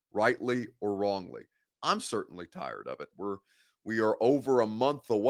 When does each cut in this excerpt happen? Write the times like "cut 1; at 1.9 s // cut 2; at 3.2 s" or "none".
cut 1; at 1.7 s // cut 2; at 3.1 s